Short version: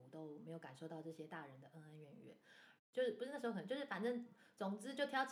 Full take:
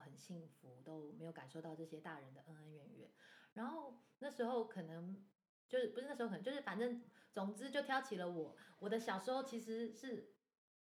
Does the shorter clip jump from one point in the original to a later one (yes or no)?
yes